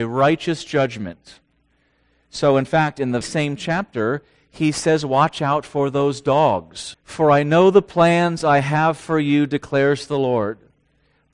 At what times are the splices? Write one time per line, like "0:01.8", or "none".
0:03.2
0:06.9